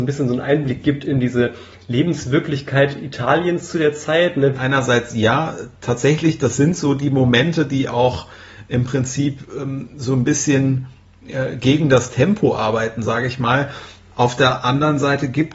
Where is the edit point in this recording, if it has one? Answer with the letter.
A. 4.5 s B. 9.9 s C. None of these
A